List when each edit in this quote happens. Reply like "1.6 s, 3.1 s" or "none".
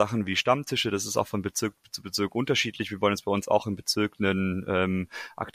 none